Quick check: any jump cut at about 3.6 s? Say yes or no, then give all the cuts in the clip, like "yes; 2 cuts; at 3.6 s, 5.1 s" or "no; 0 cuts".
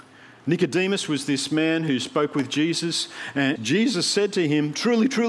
yes; 1 cut; at 3.6 s